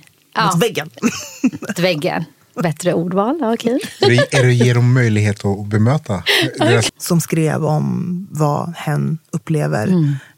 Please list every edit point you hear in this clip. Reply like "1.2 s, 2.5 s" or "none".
1.8 s, 6.9 s